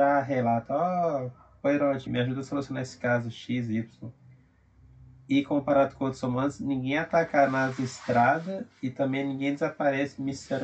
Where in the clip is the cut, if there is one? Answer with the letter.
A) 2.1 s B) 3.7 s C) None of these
A